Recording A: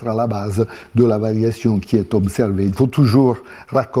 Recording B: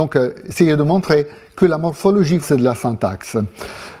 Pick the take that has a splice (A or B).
B